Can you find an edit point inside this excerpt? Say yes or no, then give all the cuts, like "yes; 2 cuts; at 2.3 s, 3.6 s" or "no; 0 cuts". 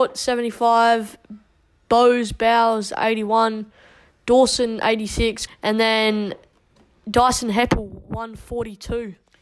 yes; 1 cut; at 5.5 s